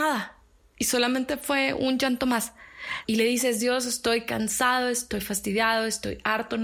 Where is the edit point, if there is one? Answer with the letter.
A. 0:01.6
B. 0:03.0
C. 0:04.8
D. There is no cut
B